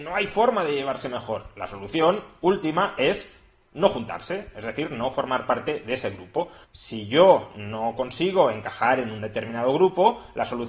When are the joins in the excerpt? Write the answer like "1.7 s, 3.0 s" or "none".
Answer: 6.6 s